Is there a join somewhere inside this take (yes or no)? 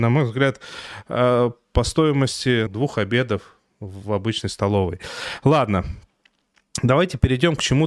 yes